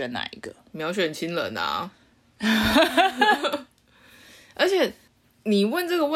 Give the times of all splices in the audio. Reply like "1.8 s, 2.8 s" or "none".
none